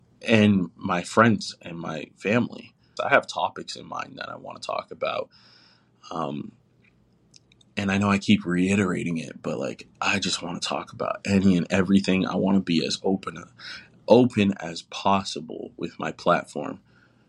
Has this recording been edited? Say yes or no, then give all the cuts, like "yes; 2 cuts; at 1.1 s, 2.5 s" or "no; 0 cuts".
yes; 1 cut; at 3.0 s